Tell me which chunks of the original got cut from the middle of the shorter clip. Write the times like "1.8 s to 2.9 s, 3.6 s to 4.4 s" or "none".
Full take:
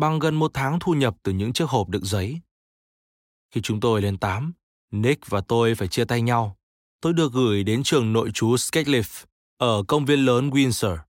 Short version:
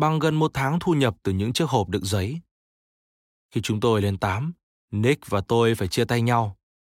none